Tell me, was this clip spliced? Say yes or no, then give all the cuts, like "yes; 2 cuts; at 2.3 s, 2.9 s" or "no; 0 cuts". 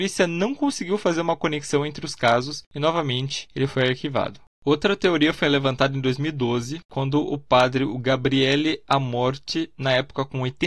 no; 0 cuts